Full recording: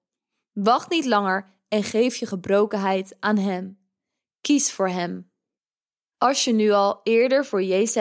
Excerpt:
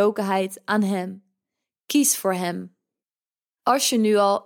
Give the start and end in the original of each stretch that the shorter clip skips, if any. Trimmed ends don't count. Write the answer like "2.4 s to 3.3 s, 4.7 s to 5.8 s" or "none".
none